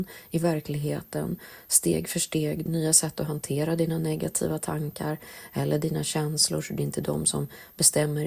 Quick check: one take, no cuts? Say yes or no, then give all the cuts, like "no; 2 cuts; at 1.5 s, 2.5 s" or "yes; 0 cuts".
no; 1 cut; at 2.7 s